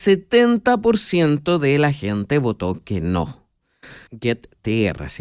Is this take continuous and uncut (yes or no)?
no